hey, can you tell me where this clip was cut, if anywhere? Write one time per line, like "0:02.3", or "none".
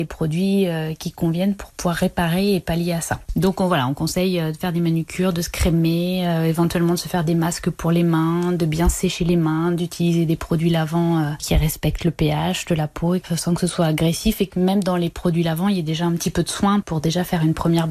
none